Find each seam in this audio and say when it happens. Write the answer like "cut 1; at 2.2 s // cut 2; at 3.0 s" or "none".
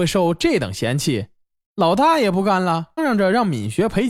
cut 1; at 1.6 s // cut 2; at 3.0 s

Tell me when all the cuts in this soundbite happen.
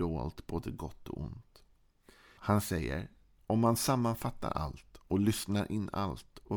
cut 1; at 2.4 s

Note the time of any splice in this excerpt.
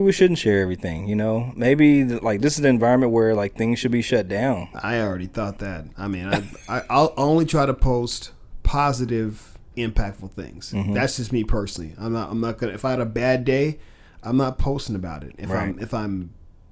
none

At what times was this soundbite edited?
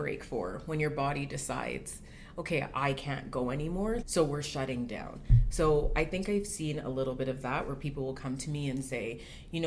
cut 1; at 4.0 s

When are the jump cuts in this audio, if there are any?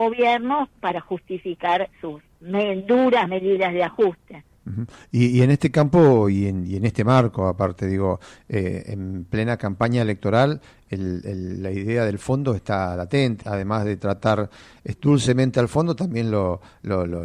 cut 1; at 13.4 s

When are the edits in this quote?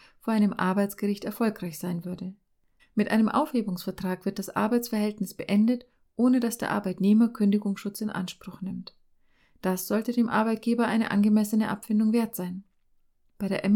cut 1; at 2.8 s

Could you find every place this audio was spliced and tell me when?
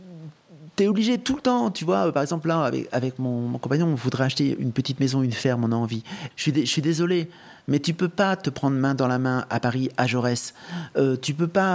cut 1; at 6.3 s

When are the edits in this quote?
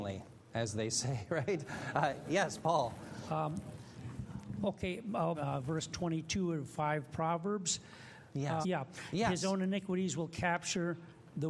cut 1; at 5.3 s // cut 2; at 8.6 s

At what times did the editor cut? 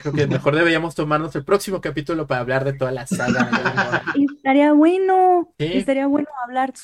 none

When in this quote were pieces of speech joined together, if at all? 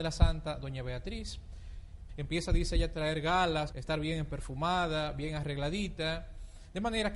cut 1; at 2.1 s // cut 2; at 3.7 s

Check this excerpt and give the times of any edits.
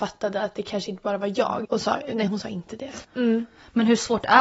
cut 1; at 1.6 s // cut 2; at 3.0 s

